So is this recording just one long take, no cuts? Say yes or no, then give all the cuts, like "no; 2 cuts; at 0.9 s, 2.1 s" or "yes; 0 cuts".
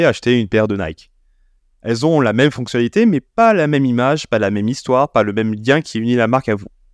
yes; 0 cuts